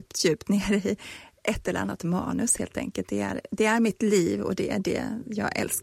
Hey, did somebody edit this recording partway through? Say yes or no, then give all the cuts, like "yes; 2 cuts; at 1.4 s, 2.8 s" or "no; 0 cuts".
no; 0 cuts